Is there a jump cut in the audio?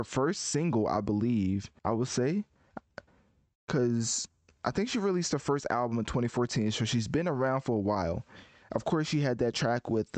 yes; 1 cut; at 1.8 s

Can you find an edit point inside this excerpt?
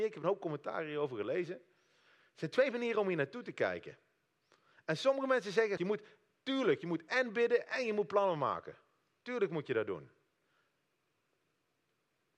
yes; 1 cut; at 5.8 s

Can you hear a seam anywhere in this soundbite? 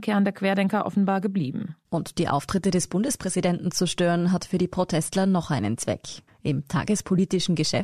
yes; 1 cut; at 6.3 s

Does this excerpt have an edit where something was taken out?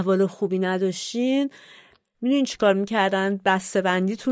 no; 0 cuts

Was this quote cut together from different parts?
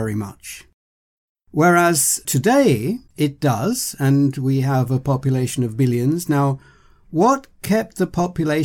yes; 1 cut; at 3.1 s

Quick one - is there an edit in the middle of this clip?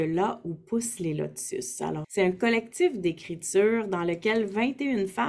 yes; 1 cut; at 2.0 s

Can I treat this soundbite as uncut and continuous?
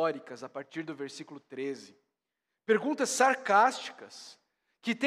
yes; 0 cuts

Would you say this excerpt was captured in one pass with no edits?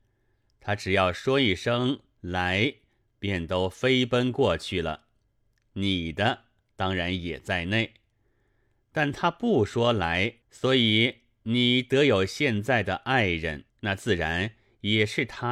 no; 2 cuts; at 10.4 s, 13.7 s

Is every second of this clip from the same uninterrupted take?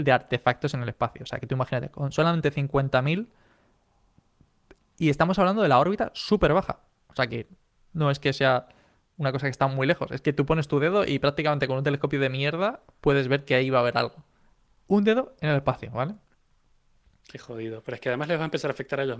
yes; 0 cuts

